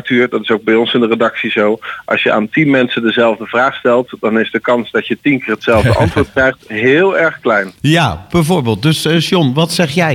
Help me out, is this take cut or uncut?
uncut